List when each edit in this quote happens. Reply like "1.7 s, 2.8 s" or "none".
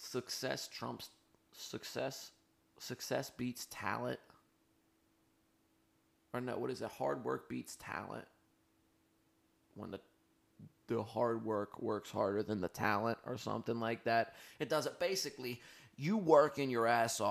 none